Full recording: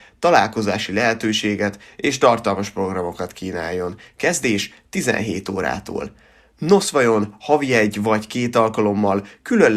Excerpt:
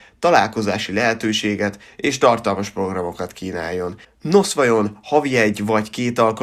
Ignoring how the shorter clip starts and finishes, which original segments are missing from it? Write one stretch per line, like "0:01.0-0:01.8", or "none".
0:04.0-0:06.4